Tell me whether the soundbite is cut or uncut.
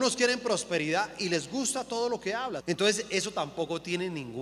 cut